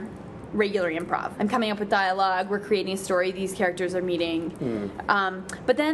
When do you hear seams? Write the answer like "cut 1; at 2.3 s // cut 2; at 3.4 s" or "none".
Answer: cut 1; at 1.3 s